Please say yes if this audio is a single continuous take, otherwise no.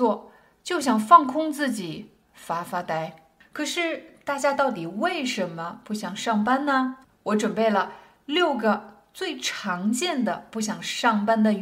yes